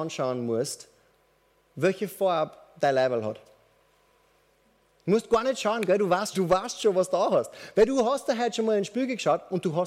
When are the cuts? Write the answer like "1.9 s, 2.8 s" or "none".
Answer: 6.3 s